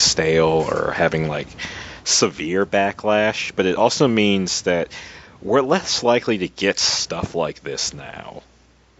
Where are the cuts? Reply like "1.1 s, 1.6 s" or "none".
none